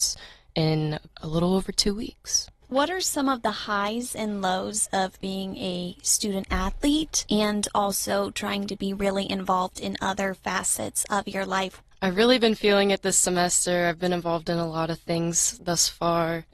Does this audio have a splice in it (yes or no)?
no